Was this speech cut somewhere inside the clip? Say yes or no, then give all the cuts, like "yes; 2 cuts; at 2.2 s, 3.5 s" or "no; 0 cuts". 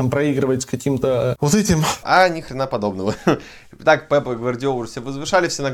yes; 1 cut; at 2.0 s